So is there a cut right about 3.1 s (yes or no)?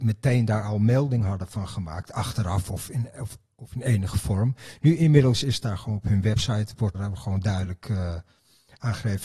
no